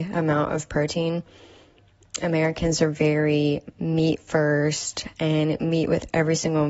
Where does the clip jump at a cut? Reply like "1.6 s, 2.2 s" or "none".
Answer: none